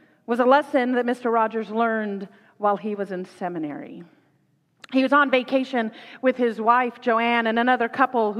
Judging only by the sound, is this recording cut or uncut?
uncut